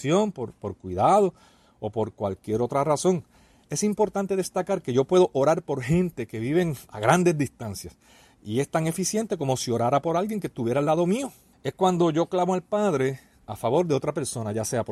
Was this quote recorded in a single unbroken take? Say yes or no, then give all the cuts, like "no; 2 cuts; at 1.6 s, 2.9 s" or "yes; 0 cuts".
no; 2 cuts; at 6.9 s, 11.5 s